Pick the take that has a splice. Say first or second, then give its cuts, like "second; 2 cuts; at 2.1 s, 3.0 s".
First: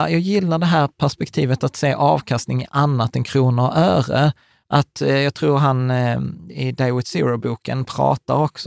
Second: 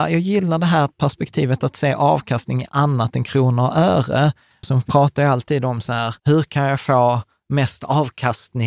second; 2 cuts; at 4.6 s, 6.2 s